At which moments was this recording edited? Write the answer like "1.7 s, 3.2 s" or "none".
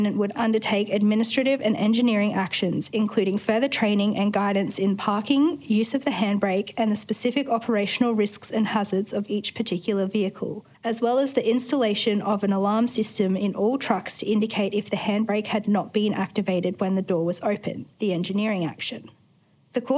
10.7 s, 17.9 s